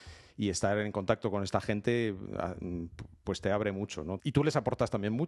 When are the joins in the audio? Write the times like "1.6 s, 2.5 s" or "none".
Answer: 4.2 s